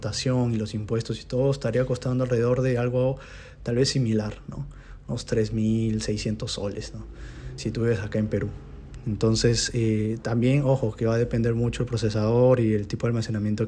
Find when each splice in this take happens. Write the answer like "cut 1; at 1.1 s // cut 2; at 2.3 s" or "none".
none